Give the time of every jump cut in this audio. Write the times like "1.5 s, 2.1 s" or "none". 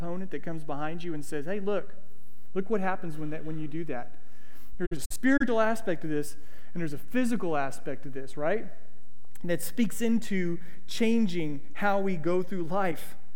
none